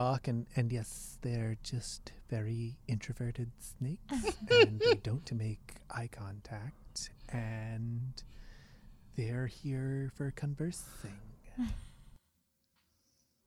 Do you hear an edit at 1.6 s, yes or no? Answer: no